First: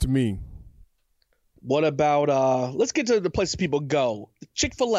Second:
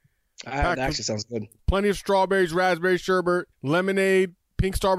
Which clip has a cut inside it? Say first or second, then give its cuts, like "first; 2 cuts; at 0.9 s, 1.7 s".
second; 2 cuts; at 1.6 s, 3.5 s